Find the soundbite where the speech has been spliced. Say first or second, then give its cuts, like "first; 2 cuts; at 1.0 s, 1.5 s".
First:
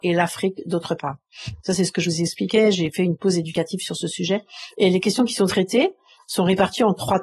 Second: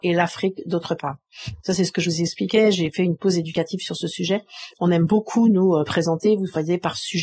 first; 1 cut; at 4.7 s